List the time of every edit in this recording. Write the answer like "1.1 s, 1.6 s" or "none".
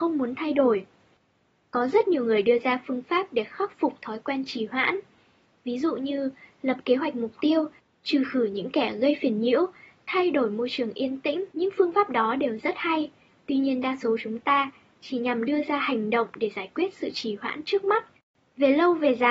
11.5 s